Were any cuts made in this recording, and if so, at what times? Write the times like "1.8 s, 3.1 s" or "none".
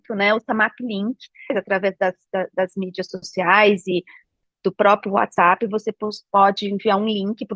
1.5 s